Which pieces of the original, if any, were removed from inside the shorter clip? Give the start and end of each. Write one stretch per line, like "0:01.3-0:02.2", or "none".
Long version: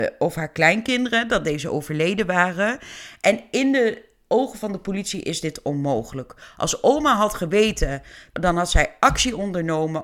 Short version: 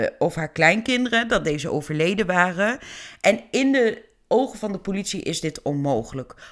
none